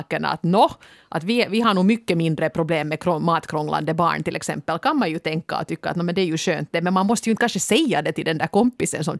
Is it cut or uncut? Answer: uncut